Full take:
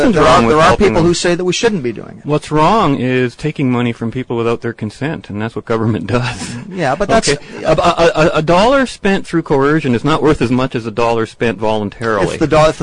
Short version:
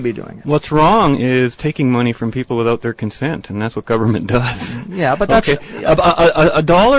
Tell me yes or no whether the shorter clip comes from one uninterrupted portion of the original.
yes